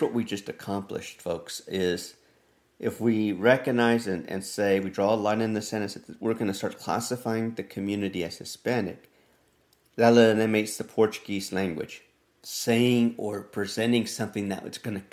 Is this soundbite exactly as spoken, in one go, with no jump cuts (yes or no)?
no